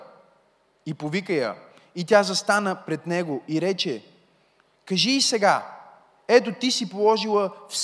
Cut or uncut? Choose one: uncut